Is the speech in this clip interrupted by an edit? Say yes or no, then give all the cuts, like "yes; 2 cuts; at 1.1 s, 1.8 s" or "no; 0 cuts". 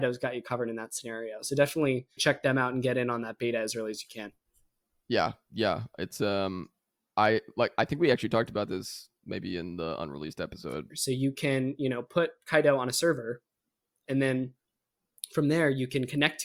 yes; 2 cuts; at 2.2 s, 10.9 s